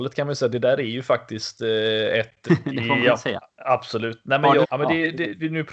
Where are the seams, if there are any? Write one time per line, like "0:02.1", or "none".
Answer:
0:02.5
0:04.6